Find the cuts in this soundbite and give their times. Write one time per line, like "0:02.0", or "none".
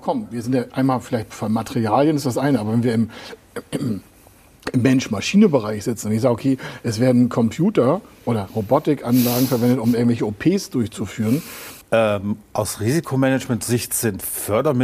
0:11.8